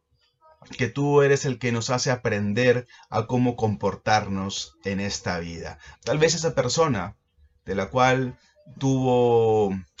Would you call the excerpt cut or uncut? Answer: cut